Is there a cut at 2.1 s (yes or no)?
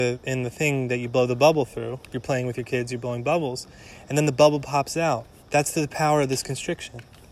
no